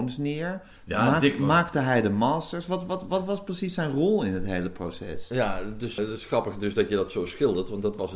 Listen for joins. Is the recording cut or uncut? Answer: cut